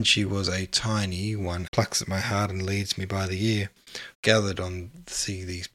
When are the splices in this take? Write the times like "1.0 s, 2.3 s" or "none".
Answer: 1.7 s, 4.1 s